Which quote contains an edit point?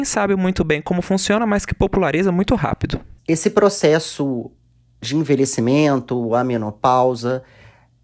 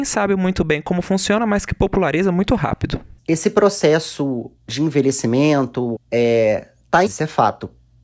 second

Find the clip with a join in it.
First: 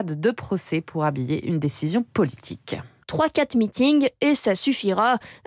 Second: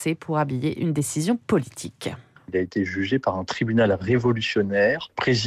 first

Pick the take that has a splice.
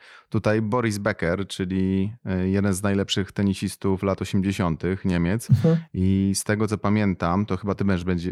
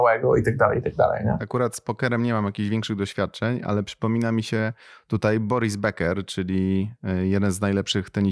second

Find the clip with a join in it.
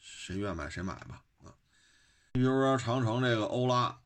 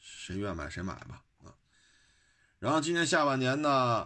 first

